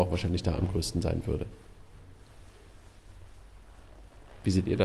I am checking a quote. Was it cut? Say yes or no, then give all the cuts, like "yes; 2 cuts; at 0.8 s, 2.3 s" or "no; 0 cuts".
no; 0 cuts